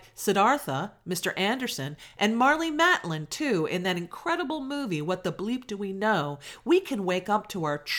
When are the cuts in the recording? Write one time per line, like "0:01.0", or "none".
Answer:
none